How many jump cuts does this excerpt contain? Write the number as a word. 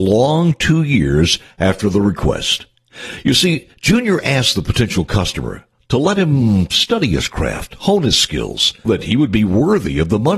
one